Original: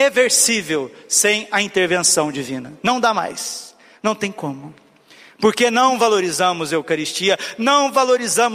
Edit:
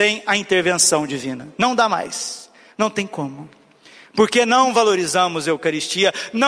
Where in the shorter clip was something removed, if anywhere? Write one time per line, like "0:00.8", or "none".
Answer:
none